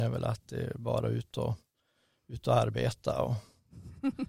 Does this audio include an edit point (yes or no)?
no